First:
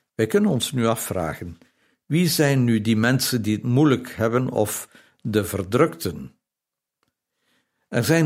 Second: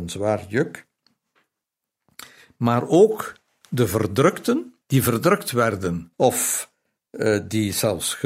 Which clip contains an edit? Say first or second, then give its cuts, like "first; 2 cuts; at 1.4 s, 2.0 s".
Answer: second; 2 cuts; at 4.8 s, 6.1 s